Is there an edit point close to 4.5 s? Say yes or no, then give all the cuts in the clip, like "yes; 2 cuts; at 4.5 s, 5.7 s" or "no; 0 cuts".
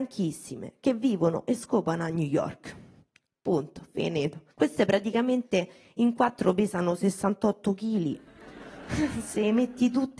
yes; 1 cut; at 4.5 s